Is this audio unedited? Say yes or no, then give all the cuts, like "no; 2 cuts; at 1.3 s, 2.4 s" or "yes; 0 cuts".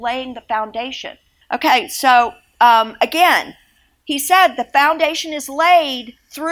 no; 1 cut; at 1.4 s